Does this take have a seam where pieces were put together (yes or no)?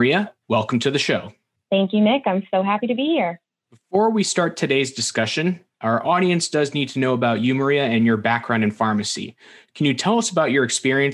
no